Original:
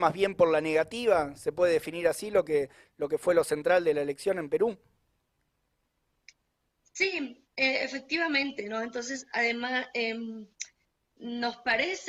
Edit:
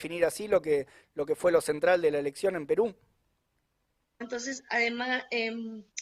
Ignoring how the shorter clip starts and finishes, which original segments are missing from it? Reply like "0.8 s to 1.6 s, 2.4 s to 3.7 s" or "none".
6.0 s to 8.8 s